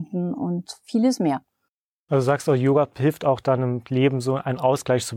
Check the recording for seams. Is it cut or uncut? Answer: uncut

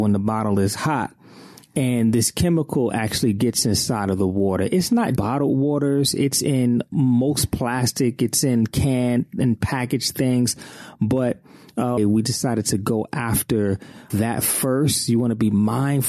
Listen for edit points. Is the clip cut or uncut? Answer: cut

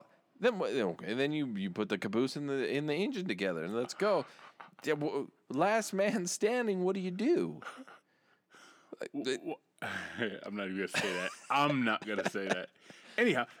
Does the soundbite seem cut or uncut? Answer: uncut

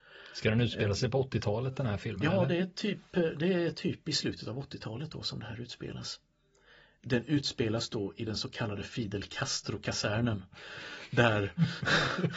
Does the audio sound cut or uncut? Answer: uncut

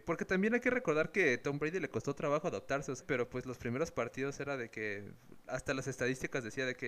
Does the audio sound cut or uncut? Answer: cut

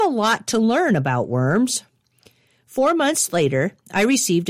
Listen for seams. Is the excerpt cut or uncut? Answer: uncut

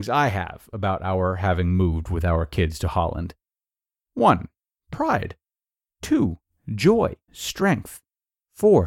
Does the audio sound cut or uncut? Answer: cut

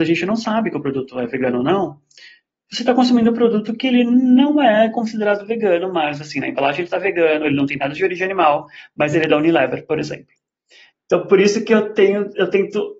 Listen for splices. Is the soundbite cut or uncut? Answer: cut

